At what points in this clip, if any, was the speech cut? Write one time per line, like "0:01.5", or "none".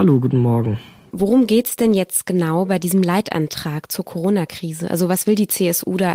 0:01.1